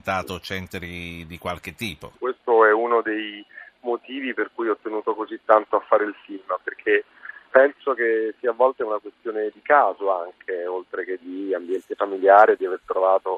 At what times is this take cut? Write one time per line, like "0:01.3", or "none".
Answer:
0:02.2